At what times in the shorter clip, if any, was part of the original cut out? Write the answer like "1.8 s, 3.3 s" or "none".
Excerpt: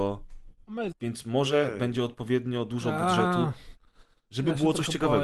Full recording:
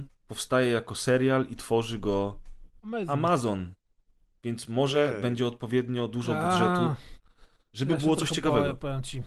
0.9 s